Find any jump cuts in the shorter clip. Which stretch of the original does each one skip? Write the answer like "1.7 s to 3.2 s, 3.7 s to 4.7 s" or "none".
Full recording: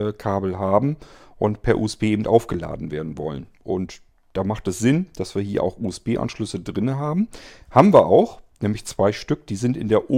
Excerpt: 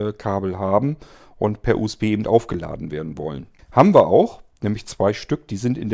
3.6 s to 7.6 s